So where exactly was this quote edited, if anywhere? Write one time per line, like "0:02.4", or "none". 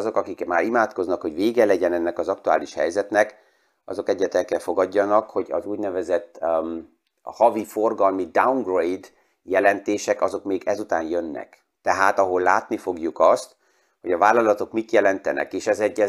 none